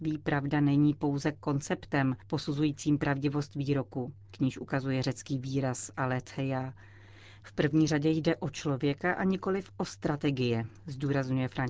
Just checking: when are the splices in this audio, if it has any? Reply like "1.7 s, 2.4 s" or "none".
4.3 s, 7.4 s